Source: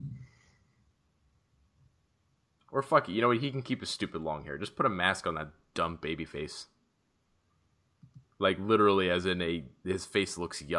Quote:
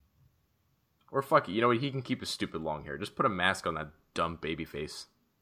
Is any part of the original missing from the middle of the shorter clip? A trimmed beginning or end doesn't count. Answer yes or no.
no